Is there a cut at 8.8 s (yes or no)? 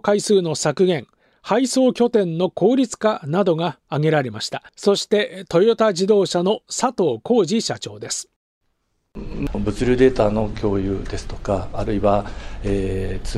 no